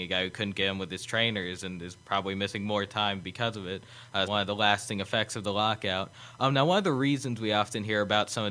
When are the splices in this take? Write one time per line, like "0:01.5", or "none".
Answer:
0:04.3